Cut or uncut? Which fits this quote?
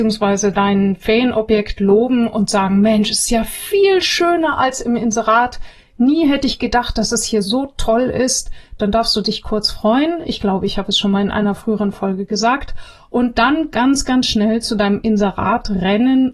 uncut